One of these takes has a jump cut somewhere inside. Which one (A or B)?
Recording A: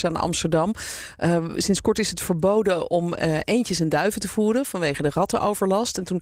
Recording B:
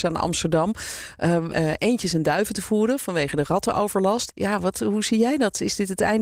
B